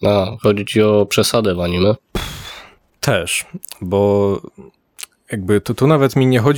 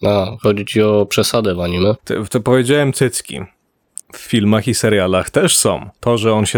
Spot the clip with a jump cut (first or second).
second